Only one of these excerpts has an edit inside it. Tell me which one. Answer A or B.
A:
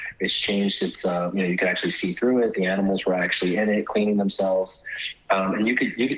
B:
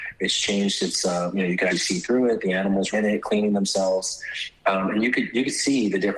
B